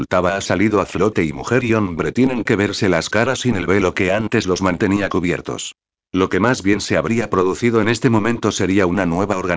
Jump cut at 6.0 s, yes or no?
yes